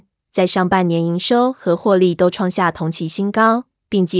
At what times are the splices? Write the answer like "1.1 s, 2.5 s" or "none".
none